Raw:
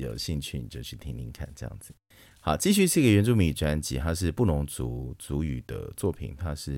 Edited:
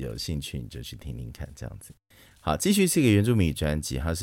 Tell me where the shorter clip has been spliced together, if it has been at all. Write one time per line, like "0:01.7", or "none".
none